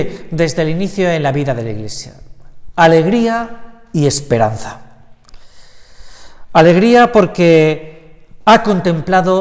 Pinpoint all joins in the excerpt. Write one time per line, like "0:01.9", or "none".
none